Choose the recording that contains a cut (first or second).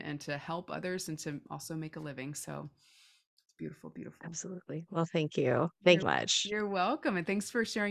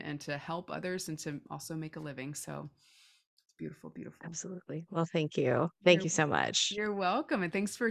first